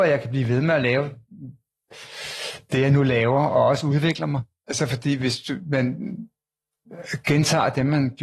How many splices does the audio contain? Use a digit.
0